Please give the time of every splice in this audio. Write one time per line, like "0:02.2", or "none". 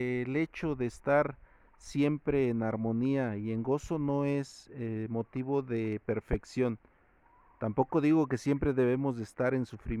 none